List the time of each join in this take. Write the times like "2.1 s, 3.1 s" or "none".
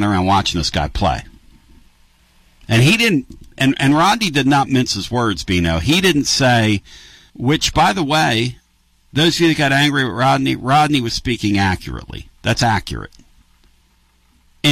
7.3 s